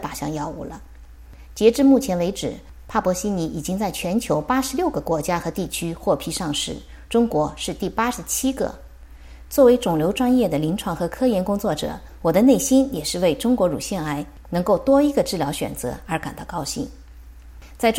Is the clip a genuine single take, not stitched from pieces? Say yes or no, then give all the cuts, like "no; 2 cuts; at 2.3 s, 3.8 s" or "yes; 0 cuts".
no; 1 cut; at 9.5 s